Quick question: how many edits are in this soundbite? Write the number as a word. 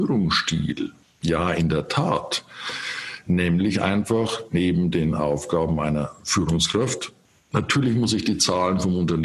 zero